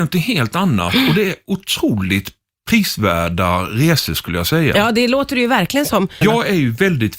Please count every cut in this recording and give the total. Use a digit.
1